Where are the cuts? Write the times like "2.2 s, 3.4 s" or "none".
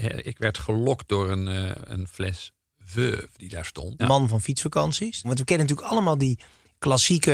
4.0 s, 5.2 s